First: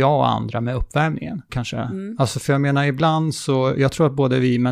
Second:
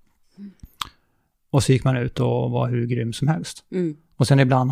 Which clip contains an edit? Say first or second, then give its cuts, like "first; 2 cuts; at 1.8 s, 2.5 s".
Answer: first; 1 cut; at 1.5 s